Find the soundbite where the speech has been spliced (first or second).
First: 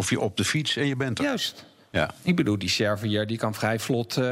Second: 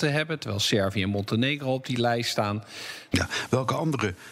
second